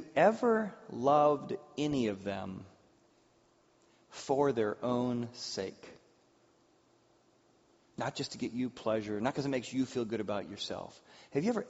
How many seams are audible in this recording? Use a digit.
0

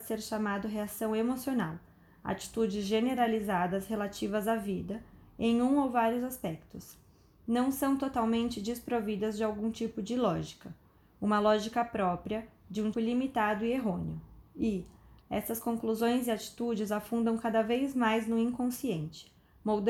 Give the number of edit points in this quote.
2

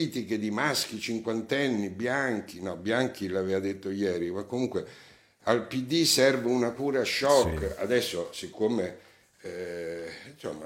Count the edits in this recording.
0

